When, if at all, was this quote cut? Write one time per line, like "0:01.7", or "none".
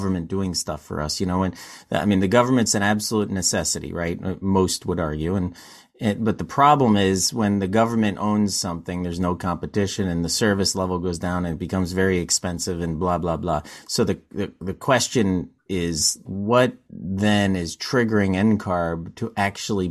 0:16.3